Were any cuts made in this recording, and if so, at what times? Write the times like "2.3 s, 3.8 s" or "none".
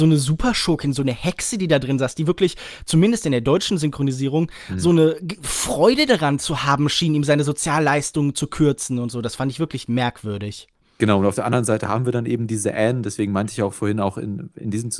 none

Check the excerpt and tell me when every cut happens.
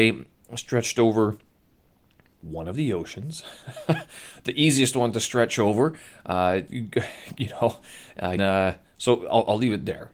8.4 s

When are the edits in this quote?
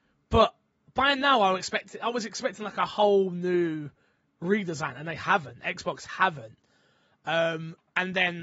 none

